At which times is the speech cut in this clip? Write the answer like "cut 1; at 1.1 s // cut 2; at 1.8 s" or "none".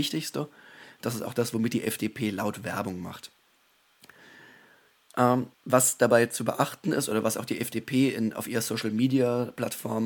cut 1; at 5.5 s